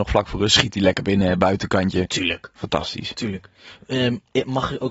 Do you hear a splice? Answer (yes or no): no